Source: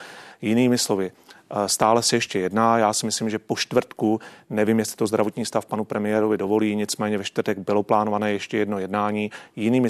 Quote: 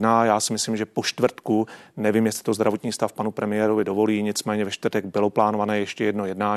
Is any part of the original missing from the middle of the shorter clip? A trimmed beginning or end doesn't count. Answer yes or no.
no